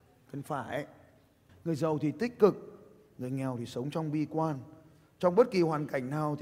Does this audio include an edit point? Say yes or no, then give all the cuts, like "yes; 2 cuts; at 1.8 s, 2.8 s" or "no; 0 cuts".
yes; 1 cut; at 1.5 s